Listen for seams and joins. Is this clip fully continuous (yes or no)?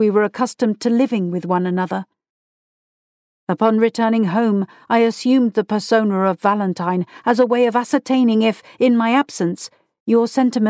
no